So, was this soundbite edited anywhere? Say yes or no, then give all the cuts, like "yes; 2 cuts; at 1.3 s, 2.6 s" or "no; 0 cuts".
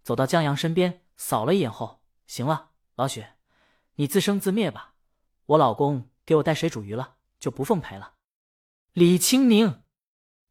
no; 0 cuts